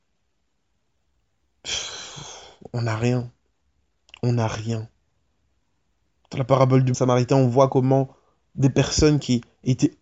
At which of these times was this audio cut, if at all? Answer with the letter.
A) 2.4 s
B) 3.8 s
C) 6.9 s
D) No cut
C